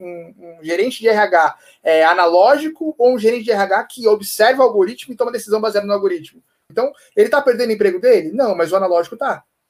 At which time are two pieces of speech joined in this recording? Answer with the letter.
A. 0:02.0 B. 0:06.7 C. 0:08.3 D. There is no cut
B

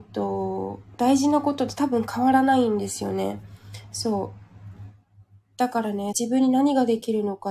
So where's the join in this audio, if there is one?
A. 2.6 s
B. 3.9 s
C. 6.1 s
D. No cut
C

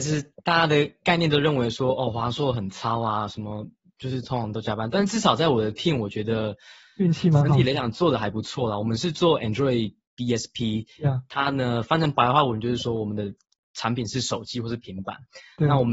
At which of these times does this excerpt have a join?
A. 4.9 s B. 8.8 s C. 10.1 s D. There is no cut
D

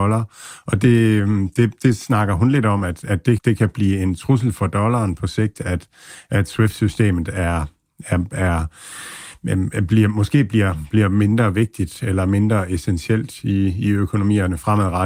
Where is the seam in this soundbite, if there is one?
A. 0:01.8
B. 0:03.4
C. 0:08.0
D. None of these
B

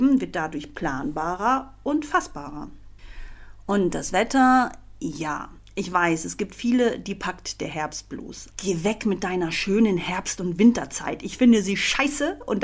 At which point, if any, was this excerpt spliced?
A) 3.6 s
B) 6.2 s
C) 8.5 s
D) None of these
C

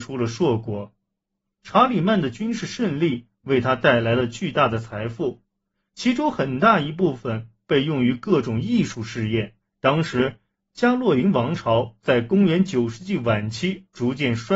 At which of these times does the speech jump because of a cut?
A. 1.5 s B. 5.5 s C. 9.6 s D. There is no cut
C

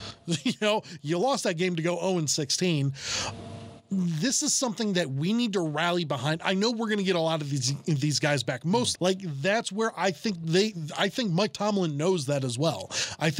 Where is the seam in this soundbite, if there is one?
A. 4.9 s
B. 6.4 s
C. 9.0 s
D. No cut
C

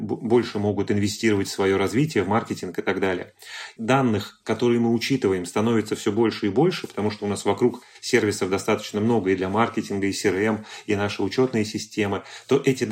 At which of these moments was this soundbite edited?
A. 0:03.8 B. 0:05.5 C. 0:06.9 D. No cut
A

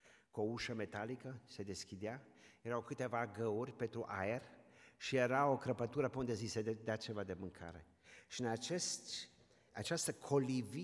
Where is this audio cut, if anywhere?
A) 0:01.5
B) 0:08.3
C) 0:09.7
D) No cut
C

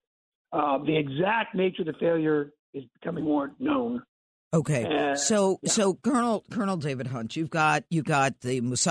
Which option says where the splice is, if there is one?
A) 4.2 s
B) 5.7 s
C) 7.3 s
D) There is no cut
D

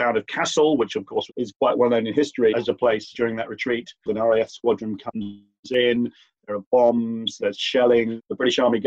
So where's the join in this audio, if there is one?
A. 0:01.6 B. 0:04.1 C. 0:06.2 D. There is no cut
B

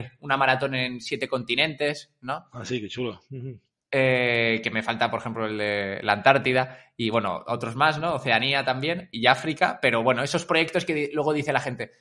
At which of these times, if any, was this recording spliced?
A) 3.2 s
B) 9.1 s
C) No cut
B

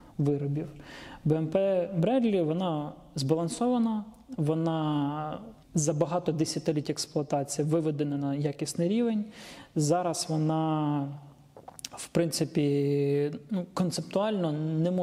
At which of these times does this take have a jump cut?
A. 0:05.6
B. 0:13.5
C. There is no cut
A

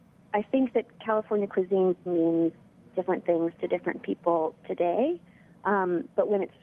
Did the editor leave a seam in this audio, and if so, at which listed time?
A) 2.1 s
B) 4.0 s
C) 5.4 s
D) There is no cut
A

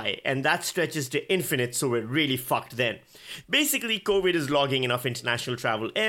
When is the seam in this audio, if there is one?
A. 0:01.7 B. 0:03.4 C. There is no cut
B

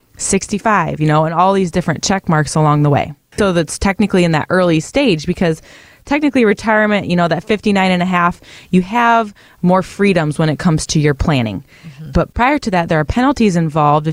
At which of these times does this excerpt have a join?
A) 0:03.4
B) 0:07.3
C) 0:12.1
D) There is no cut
A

